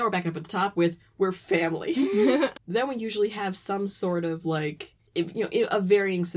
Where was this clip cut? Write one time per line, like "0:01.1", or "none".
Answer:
0:02.5